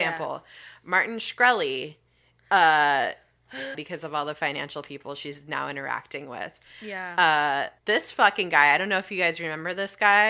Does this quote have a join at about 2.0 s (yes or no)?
no